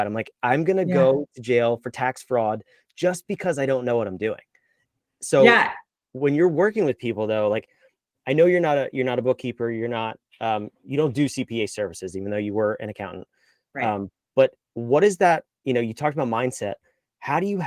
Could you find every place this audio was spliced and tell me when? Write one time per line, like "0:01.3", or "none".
none